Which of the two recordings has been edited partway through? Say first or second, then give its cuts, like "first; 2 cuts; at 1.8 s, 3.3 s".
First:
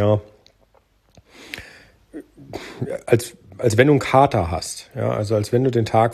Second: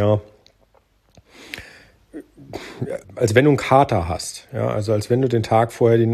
second; 1 cut; at 3.0 s